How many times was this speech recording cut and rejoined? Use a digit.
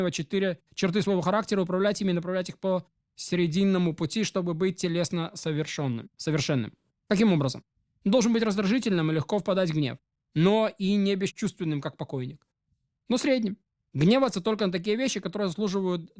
0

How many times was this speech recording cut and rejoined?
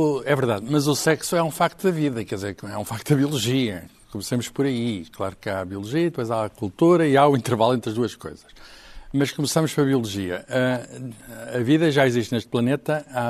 0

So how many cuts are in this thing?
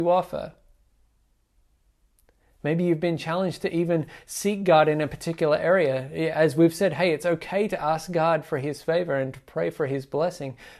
0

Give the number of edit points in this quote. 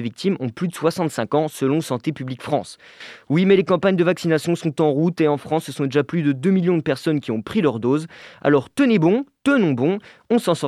0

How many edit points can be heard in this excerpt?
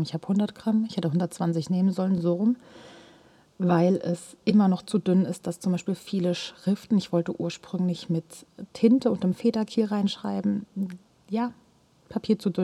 0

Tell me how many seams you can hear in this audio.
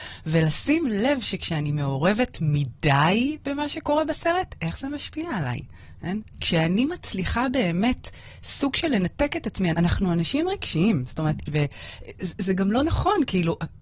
3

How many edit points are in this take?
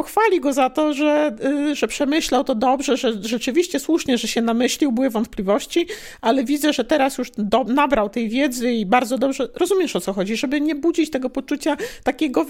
0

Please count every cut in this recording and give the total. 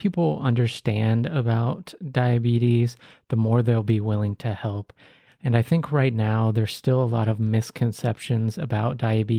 0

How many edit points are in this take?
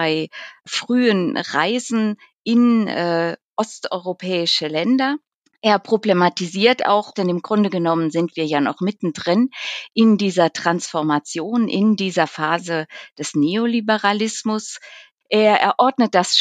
2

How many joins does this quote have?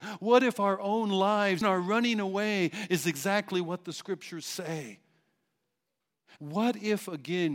2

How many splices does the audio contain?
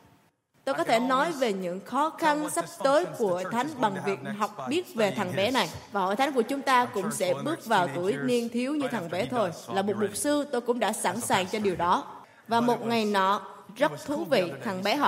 0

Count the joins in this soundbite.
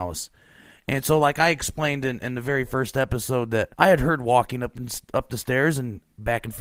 1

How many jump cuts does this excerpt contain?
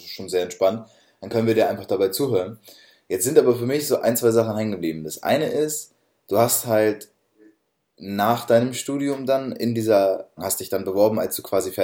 1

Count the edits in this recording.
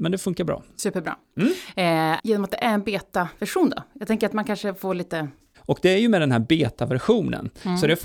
2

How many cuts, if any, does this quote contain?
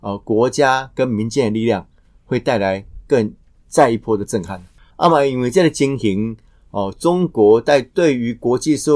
1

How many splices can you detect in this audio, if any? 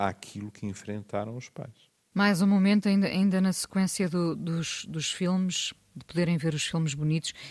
1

